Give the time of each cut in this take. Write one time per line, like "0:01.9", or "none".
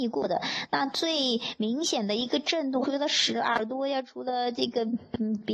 0:02.8